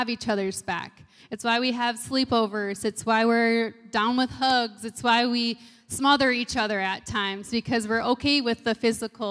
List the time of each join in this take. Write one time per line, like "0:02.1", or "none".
0:01.2